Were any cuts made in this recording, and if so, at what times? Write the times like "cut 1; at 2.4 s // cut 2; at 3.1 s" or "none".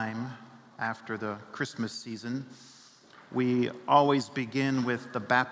none

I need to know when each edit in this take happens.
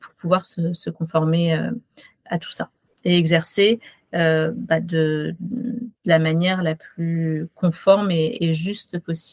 cut 1; at 6.0 s

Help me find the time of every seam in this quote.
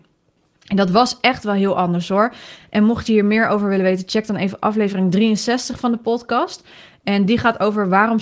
none

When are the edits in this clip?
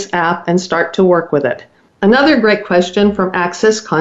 cut 1; at 1.9 s

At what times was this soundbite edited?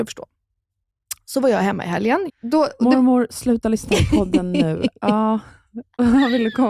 cut 1; at 2.3 s

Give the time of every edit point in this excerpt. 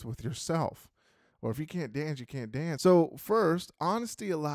cut 1; at 1.3 s // cut 2; at 2.8 s

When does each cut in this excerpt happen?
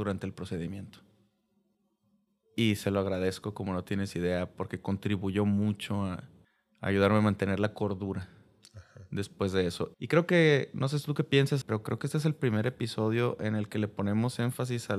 cut 1; at 9.9 s // cut 2; at 11.6 s

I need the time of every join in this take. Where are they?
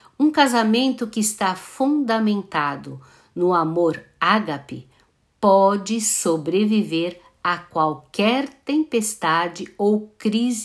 none

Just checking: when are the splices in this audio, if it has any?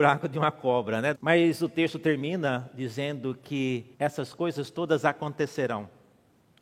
cut 1; at 1.1 s // cut 2; at 3.9 s

